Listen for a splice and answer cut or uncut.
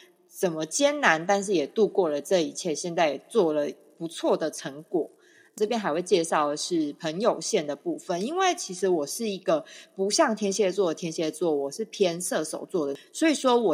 uncut